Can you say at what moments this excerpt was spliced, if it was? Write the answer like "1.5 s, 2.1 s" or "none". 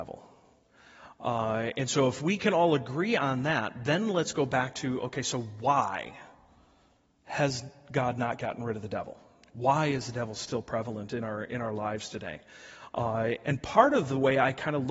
13.4 s